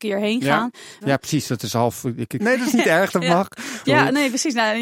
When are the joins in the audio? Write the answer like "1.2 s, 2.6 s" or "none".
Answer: 1.0 s, 2.4 s, 3.8 s

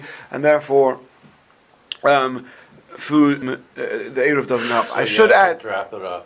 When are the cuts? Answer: 3.4 s

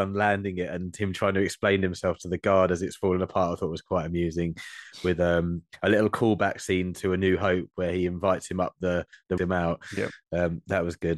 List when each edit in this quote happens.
9.4 s

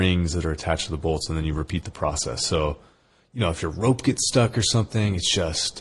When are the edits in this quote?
none

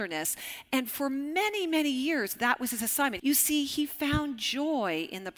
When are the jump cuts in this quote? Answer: 3.2 s

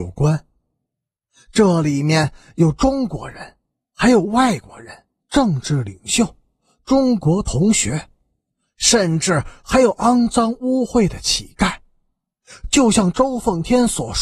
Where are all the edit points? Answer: 5.2 s

